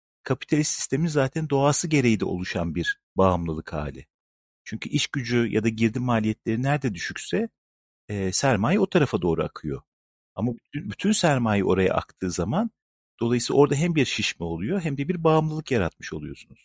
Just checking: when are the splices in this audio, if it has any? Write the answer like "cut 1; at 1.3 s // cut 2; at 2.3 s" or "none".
none